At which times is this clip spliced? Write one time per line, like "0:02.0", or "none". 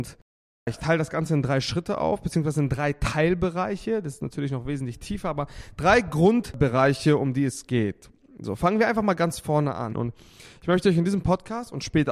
0:09.9

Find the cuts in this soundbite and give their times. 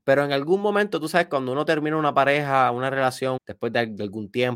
0:03.4

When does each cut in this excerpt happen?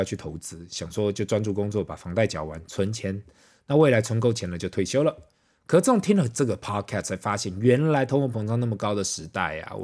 none

